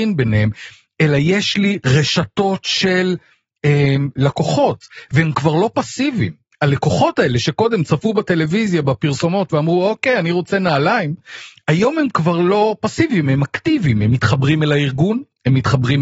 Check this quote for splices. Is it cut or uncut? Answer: uncut